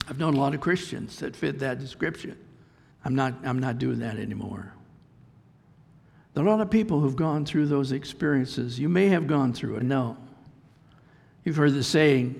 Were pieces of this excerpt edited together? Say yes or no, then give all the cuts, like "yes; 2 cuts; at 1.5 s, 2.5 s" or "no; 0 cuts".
yes; 2 cuts; at 2.9 s, 9.8 s